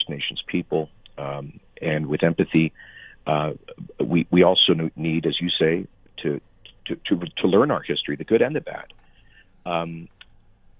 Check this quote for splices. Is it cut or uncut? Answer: uncut